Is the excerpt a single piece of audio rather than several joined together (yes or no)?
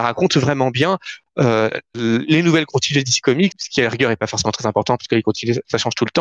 no